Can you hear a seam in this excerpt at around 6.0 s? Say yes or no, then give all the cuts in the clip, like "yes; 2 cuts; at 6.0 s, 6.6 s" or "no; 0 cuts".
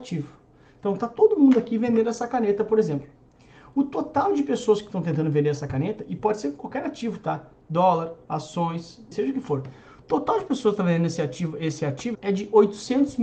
no; 2 cuts; at 9.1 s, 12.1 s